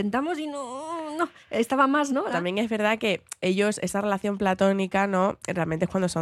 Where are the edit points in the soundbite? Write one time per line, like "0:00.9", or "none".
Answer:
0:02.3